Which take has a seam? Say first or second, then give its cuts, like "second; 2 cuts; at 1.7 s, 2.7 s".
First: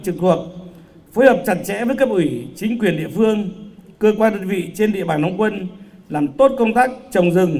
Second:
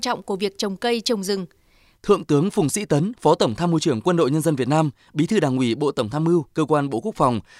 second; 1 cut; at 2.0 s